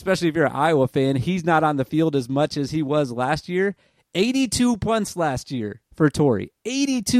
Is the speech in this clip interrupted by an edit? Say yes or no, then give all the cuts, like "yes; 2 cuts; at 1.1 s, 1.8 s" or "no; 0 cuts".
yes; 1 cut; at 5.9 s